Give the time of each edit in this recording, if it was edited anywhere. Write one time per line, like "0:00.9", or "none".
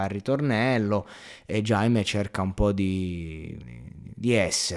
0:03.6